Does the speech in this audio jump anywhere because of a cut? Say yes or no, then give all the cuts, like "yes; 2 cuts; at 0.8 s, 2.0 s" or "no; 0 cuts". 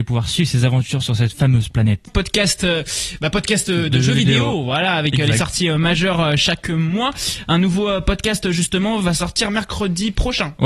yes; 1 cut; at 2.1 s